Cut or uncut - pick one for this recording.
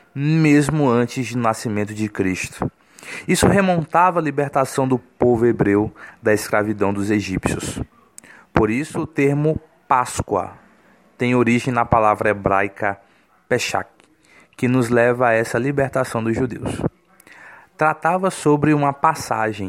uncut